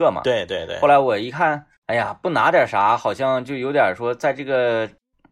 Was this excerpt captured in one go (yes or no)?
no